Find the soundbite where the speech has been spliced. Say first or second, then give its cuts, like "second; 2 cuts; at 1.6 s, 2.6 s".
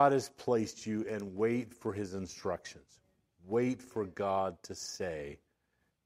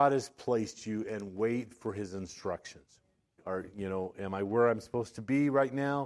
second; 1 cut; at 3.4 s